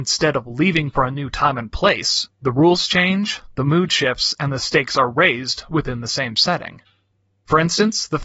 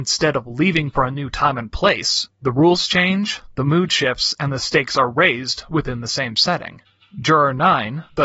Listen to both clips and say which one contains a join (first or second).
second